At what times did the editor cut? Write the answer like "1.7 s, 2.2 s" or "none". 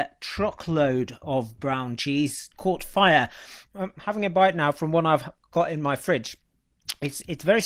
2.5 s, 3.7 s